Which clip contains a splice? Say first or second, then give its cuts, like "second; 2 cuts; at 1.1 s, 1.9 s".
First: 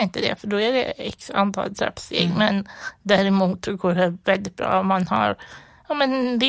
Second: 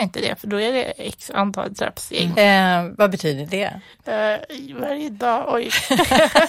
second; 1 cut; at 2.3 s